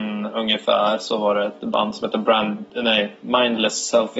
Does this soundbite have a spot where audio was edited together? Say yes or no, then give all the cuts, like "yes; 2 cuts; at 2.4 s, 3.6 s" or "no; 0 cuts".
no; 0 cuts